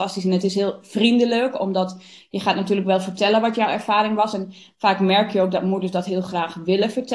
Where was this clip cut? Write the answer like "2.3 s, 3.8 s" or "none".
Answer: none